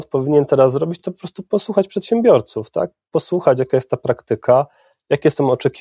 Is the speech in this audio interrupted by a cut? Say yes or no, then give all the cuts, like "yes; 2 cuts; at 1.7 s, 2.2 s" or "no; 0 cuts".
no; 0 cuts